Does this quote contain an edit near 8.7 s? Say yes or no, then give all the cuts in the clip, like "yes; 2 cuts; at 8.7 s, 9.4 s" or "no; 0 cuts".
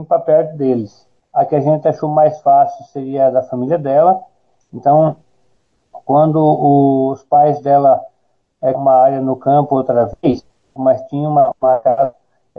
yes; 3 cuts; at 1.2 s, 8.7 s, 10.8 s